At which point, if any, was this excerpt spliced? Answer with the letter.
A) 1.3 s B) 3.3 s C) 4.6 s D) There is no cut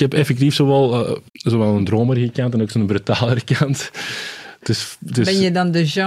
A